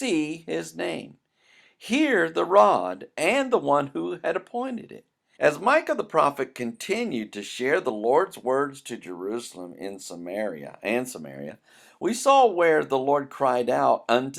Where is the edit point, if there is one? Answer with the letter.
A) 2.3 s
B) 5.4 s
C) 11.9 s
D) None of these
B